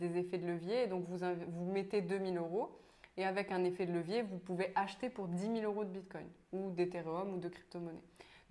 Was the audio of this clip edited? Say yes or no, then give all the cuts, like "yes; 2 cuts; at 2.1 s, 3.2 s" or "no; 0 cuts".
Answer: no; 0 cuts